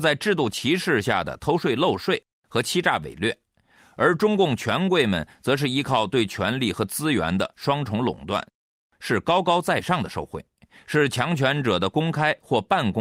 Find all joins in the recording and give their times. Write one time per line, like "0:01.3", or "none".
none